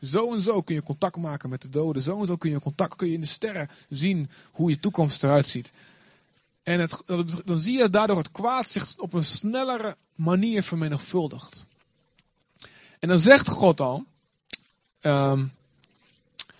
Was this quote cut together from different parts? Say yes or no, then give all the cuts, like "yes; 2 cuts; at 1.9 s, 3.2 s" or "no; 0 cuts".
no; 0 cuts